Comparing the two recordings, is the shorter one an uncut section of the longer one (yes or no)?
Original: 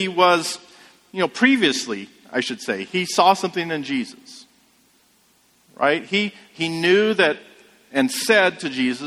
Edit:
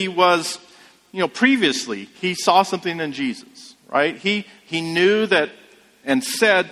no